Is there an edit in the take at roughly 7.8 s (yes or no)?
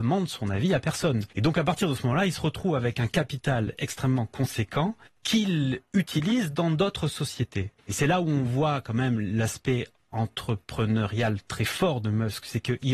no